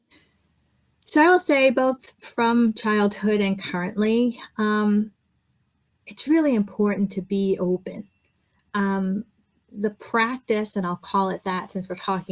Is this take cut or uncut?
uncut